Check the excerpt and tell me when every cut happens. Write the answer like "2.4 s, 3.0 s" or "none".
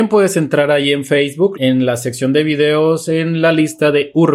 1.5 s